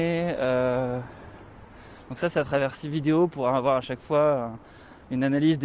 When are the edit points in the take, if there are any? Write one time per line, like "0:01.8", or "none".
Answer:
none